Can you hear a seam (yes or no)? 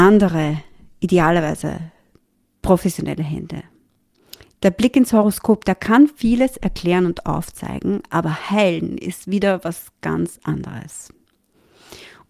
no